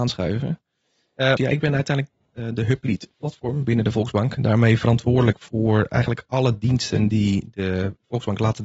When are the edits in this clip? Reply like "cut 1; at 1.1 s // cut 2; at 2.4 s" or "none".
cut 1; at 1.4 s